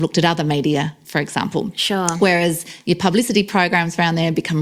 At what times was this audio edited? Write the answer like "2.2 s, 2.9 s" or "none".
none